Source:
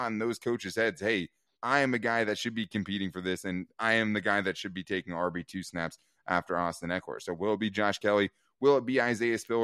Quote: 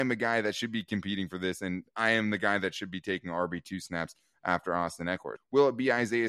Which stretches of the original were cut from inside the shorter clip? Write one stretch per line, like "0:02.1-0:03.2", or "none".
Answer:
0:07.2-0:08.5